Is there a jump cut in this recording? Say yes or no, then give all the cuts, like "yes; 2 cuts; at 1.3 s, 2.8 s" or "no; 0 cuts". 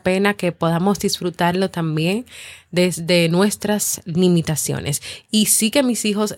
no; 0 cuts